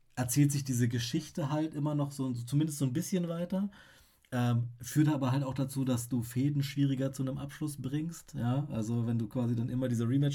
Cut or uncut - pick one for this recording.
uncut